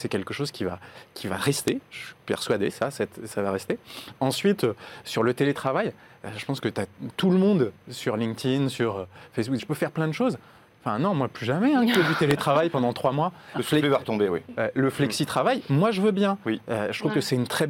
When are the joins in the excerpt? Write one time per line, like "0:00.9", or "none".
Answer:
0:09.6